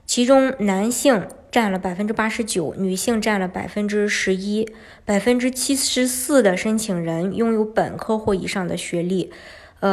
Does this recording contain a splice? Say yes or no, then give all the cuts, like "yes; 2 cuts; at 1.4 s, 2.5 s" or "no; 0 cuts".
no; 0 cuts